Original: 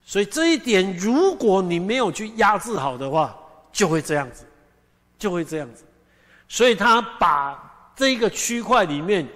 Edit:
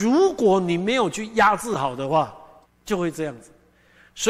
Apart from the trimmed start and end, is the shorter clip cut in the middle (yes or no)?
yes